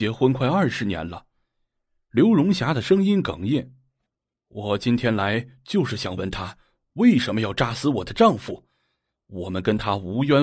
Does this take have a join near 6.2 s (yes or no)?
yes